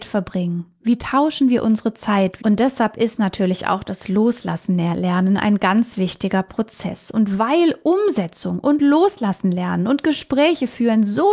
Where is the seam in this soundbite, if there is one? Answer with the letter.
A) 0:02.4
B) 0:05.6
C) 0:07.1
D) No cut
A